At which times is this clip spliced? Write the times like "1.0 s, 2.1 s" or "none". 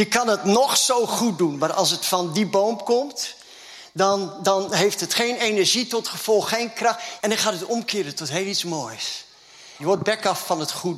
7.2 s, 9.8 s